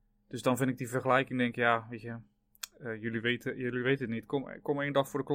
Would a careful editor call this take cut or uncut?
uncut